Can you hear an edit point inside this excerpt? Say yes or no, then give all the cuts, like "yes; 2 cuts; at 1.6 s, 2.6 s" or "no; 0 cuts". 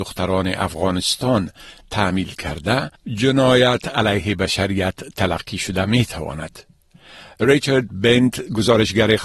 no; 0 cuts